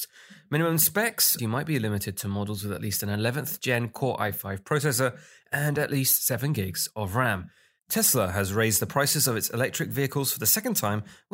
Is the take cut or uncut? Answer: cut